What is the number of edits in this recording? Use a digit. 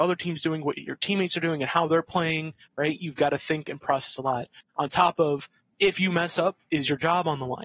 0